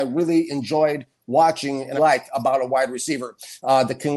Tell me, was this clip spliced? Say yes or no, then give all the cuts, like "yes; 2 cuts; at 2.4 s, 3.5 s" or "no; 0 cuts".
yes; 1 cut; at 2.0 s